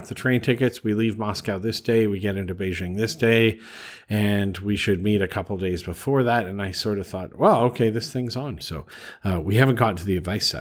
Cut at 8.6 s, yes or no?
yes